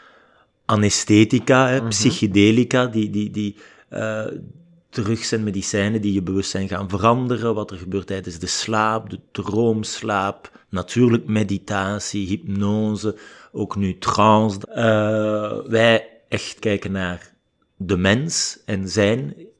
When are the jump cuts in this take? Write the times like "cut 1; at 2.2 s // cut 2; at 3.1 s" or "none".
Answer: cut 1; at 14.6 s // cut 2; at 16.6 s